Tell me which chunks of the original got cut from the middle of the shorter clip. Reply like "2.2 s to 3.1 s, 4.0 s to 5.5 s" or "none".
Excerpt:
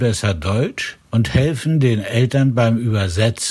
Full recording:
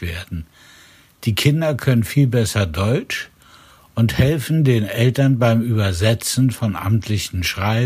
3.4 s to 3.9 s

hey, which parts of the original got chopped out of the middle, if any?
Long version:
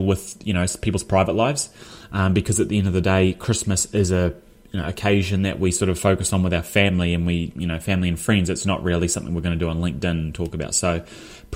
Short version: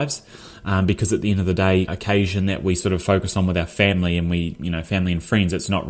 3.3 s to 4.8 s

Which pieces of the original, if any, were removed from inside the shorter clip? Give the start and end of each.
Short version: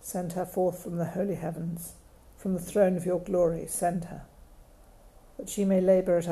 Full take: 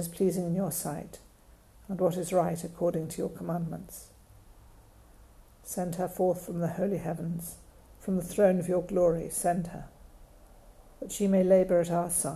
none

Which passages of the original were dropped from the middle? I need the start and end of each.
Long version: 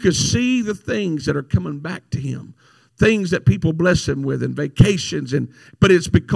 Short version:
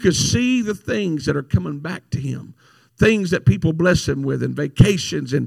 none

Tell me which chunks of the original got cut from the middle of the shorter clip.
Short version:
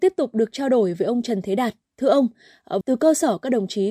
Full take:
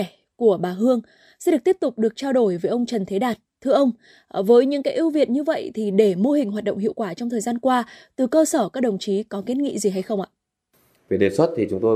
4.4 s to 8.1 s

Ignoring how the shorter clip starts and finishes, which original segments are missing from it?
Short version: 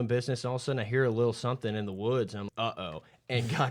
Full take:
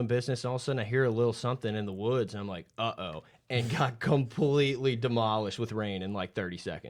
2.5 s to 2.7 s

